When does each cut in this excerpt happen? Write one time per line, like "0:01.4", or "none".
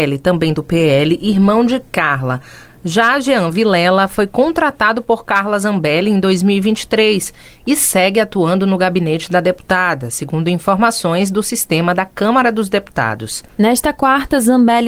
0:13.5

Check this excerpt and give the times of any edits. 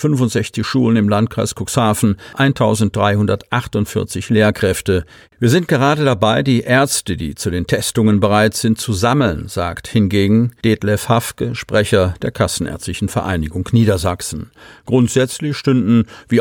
0:05.3

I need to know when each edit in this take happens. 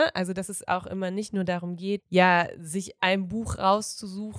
0:02.0

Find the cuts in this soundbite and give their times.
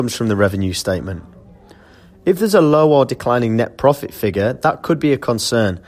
none

